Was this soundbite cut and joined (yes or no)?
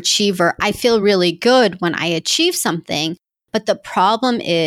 no